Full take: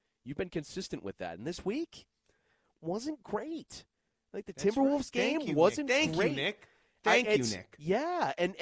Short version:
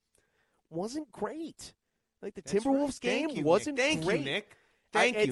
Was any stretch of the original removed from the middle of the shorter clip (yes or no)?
no